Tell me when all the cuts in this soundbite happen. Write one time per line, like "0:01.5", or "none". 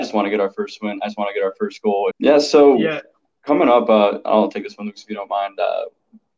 0:02.1